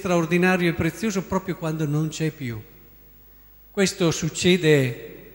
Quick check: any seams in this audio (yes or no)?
no